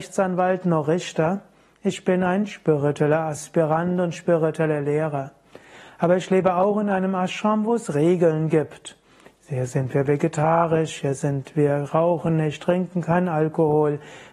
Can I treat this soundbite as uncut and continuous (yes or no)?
yes